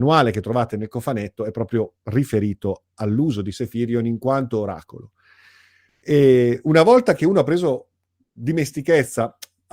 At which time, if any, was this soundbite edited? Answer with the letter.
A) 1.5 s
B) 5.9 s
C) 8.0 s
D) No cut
B